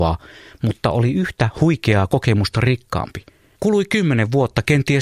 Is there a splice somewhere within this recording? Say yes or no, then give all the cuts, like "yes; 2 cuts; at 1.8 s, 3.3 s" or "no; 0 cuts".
yes; 1 cut; at 3.5 s